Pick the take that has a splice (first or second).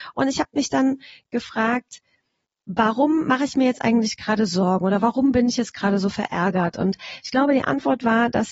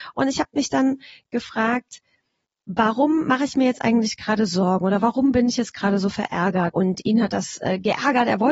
second